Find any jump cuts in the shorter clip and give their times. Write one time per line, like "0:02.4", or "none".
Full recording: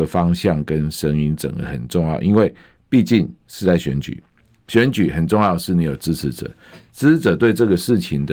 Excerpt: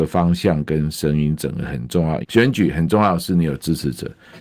0:02.2